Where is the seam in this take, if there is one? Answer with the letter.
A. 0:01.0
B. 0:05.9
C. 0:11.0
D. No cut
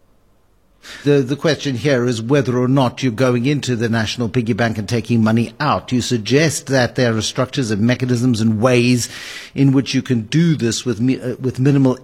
A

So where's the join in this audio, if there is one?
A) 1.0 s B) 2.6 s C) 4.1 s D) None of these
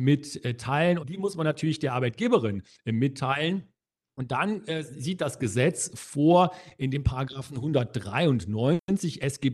A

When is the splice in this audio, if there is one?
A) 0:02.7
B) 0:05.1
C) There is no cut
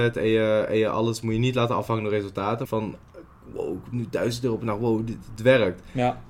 A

